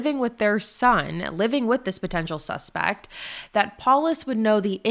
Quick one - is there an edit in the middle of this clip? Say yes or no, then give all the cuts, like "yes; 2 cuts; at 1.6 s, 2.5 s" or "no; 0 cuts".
no; 0 cuts